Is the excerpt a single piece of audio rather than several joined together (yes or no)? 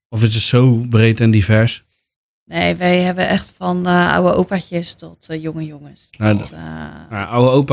yes